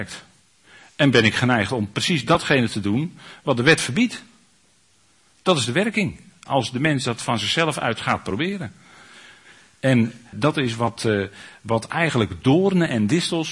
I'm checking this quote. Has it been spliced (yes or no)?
yes